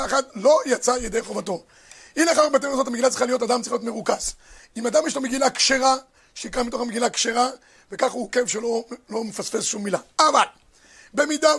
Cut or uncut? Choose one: uncut